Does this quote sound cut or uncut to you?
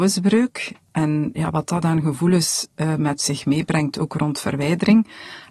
uncut